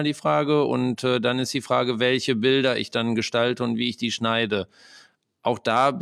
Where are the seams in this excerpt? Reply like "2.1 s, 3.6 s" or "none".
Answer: none